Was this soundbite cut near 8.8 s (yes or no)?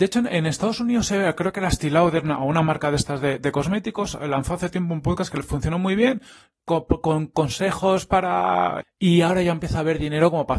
yes